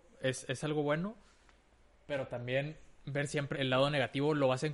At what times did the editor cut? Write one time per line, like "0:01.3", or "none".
0:03.5